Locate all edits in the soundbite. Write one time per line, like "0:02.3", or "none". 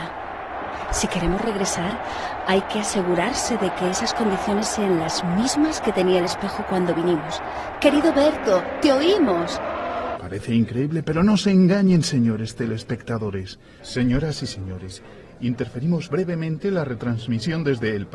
0:10.1
0:13.8